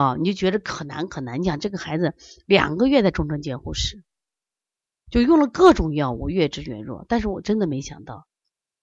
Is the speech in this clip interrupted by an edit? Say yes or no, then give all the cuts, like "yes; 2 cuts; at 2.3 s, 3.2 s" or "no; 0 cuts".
no; 0 cuts